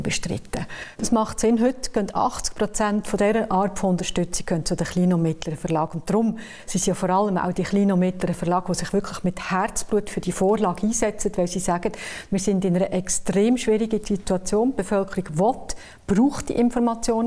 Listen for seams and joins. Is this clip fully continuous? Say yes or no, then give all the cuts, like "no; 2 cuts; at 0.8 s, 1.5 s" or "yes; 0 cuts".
yes; 0 cuts